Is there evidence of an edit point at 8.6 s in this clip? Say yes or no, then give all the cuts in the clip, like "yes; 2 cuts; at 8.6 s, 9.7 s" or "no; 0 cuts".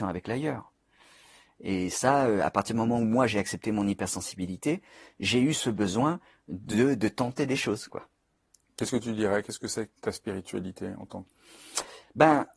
no; 1 cut; at 10.0 s